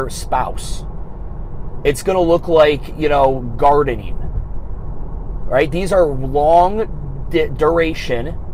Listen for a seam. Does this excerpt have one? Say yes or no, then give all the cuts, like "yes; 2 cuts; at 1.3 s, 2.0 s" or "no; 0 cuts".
no; 0 cuts